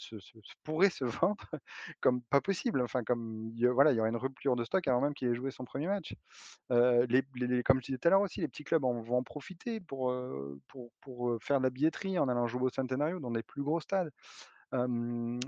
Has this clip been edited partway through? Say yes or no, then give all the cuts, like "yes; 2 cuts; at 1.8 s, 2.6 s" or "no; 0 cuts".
no; 0 cuts